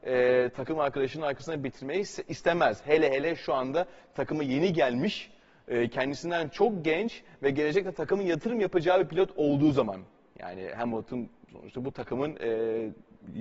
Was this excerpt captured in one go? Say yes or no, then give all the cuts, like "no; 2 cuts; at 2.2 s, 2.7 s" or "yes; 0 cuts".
yes; 0 cuts